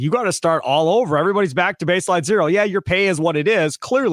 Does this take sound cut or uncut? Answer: uncut